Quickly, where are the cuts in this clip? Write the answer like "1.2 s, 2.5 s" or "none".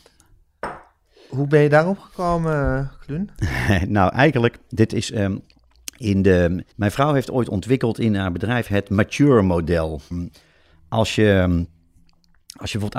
6.7 s, 10.1 s

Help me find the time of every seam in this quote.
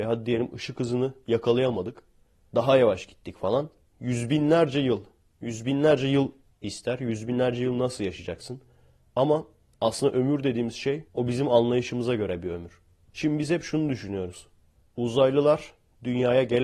11.1 s, 13.0 s

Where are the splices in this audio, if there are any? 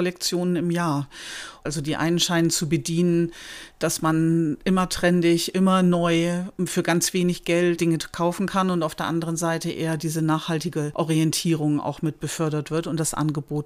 1.7 s, 7.8 s

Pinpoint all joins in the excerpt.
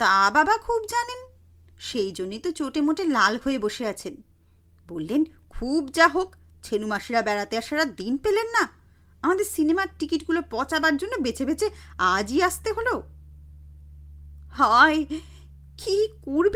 14.5 s

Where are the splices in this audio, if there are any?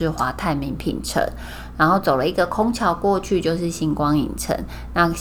none

